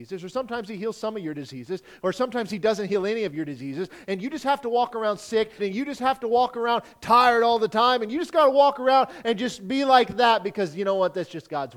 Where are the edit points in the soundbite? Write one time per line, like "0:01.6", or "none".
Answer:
0:05.6